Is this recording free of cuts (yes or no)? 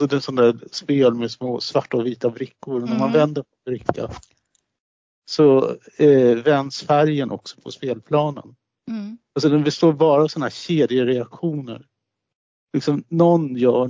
yes